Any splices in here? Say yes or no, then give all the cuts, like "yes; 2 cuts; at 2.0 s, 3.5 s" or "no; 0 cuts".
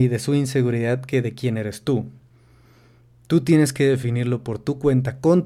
no; 0 cuts